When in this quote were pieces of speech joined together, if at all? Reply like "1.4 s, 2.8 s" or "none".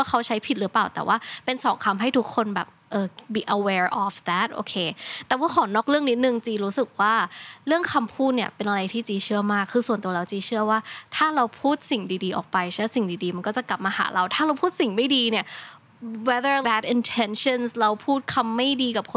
16.6 s